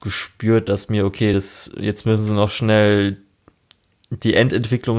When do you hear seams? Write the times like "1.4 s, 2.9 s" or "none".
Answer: none